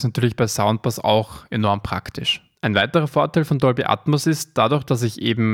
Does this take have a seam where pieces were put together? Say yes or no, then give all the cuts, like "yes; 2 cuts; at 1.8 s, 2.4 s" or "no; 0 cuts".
yes; 1 cut; at 2.6 s